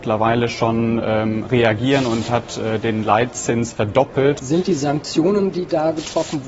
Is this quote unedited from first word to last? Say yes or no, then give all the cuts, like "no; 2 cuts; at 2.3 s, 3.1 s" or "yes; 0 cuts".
no; 1 cut; at 4.4 s